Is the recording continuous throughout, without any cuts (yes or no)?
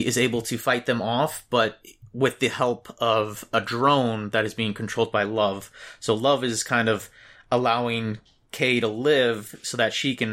yes